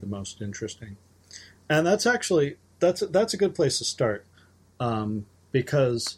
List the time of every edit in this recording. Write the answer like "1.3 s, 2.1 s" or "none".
none